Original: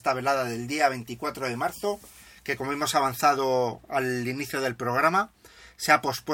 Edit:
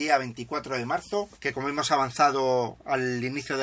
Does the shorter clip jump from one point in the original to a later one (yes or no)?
yes